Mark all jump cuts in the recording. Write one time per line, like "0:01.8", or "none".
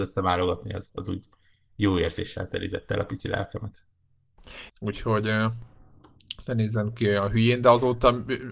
0:04.7